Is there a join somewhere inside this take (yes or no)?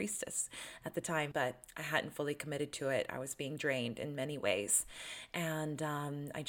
yes